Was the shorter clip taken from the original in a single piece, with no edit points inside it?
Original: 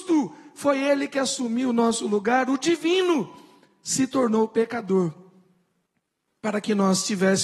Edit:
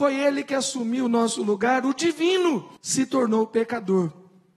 no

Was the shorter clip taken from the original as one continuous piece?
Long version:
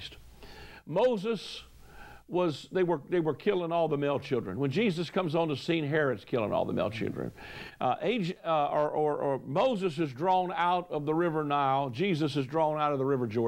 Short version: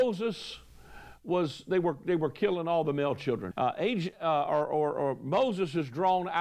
no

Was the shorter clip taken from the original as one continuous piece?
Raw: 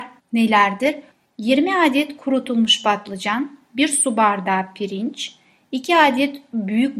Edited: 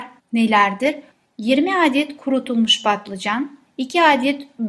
no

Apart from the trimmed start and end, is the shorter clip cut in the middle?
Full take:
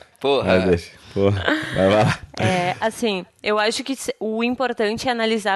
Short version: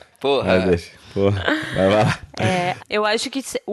yes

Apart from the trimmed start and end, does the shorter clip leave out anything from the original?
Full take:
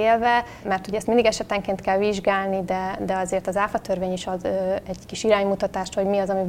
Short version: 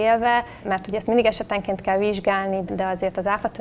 yes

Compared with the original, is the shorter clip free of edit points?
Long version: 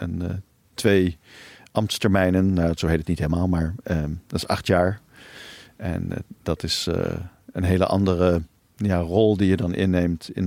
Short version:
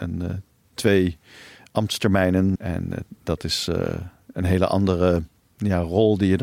no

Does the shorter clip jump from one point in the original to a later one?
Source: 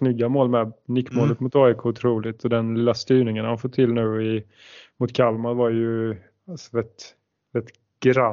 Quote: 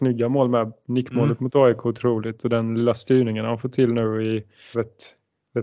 yes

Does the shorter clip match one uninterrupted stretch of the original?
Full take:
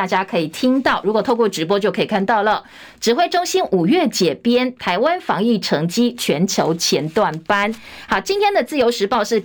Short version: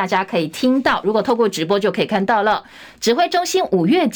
yes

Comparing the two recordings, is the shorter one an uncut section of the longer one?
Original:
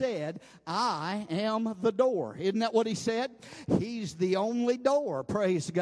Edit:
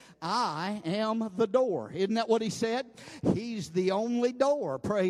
yes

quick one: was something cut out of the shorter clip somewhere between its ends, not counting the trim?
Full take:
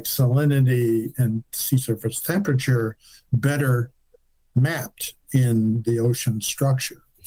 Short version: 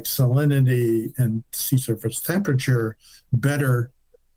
no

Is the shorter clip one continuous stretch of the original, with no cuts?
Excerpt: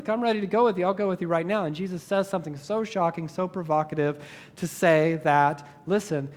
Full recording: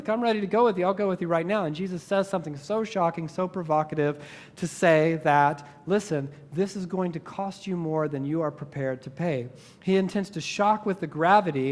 yes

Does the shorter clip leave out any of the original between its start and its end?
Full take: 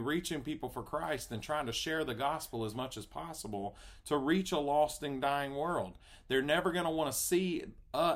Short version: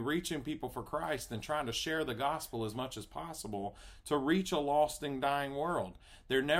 no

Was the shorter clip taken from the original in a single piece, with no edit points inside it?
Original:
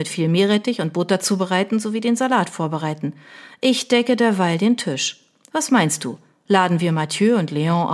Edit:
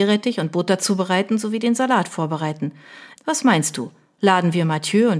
no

